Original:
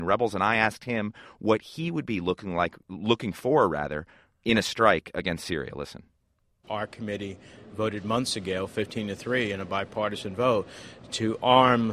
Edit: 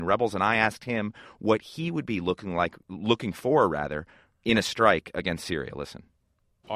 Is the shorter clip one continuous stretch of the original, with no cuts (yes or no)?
yes